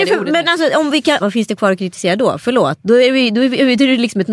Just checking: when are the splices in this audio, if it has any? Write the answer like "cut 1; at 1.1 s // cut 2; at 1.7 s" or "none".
cut 1; at 1.2 s